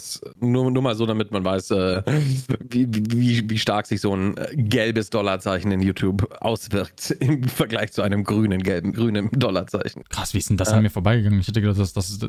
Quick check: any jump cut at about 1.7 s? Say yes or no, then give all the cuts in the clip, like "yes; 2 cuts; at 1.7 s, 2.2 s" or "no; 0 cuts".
no; 2 cuts; at 8.9 s, 10.0 s